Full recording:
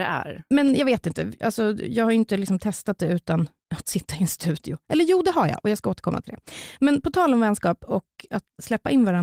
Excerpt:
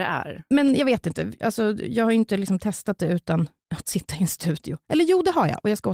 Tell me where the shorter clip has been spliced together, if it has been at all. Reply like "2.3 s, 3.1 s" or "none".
none